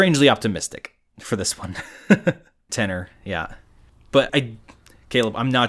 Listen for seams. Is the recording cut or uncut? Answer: cut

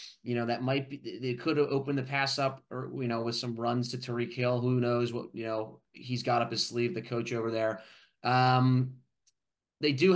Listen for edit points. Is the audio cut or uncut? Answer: uncut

